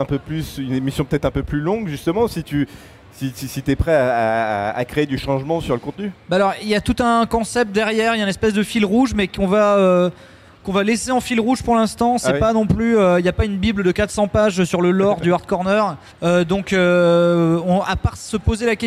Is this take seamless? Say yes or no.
no